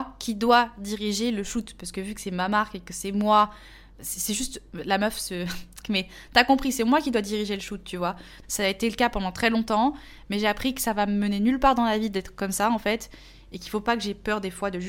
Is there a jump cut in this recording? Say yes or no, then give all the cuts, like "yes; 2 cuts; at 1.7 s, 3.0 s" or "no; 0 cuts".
yes; 2 cuts; at 5.8 s, 8.4 s